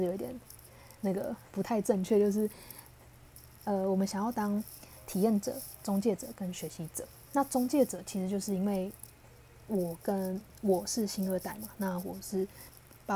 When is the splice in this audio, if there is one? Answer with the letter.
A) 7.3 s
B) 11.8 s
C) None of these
C